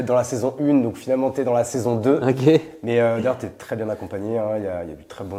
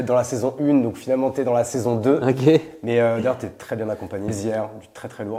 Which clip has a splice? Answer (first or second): second